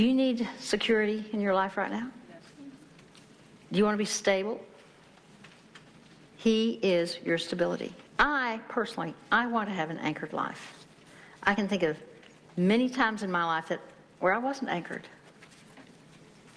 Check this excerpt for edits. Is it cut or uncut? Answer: cut